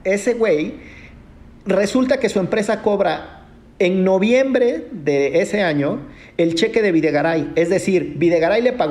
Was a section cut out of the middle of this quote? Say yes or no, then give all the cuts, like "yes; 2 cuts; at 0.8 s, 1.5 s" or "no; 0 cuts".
no; 0 cuts